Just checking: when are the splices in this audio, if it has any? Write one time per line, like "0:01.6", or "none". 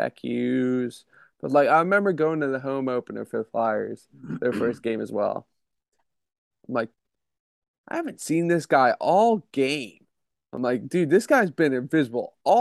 0:06.5